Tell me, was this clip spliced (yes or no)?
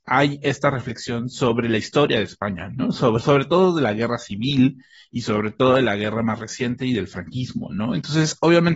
no